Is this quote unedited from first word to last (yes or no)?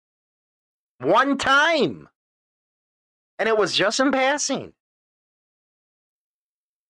yes